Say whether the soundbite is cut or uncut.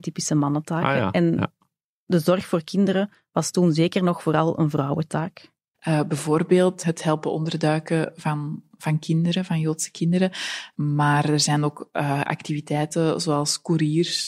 cut